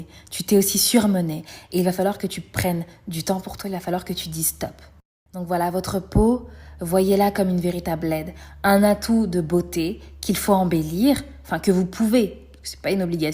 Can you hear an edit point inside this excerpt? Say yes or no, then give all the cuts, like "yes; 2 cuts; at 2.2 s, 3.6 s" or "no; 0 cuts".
no; 0 cuts